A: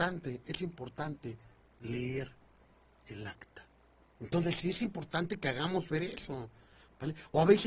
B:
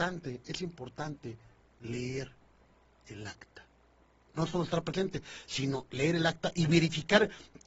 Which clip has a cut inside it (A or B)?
A